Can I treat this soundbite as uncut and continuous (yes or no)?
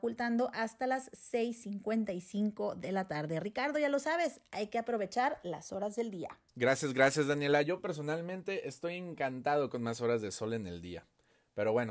no